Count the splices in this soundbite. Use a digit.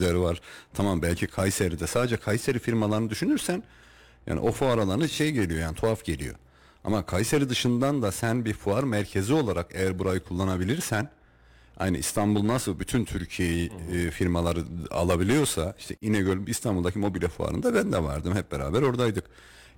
0